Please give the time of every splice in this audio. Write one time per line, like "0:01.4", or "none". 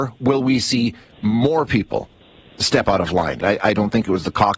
0:03.4